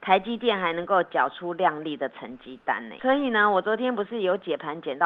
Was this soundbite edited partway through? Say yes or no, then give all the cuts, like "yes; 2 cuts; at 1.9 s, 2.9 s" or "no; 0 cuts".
yes; 1 cut; at 3.0 s